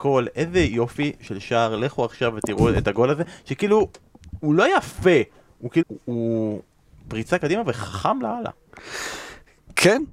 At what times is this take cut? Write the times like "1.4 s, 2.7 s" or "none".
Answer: 5.8 s